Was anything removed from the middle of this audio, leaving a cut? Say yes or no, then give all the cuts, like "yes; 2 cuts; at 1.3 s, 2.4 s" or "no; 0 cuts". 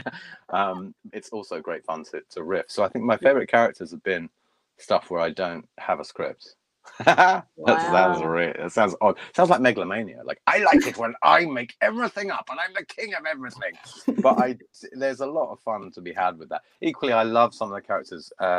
yes; 1 cut; at 1.1 s